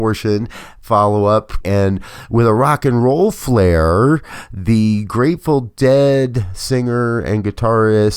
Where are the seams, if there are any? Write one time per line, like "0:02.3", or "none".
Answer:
0:01.6